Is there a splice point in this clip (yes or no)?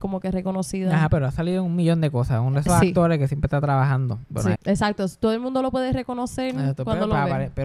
yes